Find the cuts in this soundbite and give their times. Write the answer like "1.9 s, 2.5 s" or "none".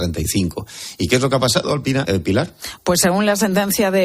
2.0 s